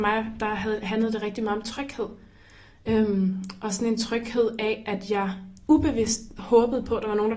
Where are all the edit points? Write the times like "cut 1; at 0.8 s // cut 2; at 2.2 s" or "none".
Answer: none